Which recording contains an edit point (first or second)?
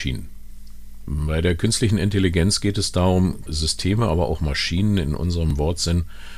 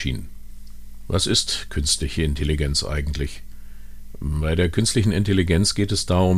first